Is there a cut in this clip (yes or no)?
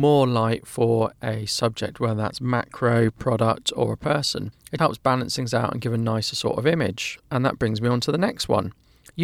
yes